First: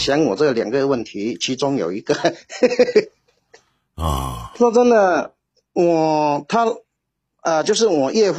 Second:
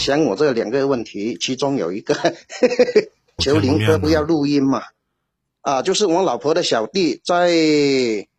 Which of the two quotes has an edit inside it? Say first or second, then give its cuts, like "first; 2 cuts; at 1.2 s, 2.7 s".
second; 2 cuts; at 3.4 s, 5.5 s